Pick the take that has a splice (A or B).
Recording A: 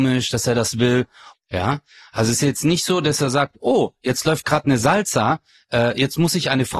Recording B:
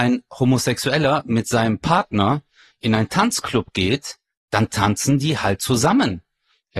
A